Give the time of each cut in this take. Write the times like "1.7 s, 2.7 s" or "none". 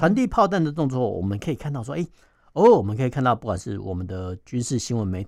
none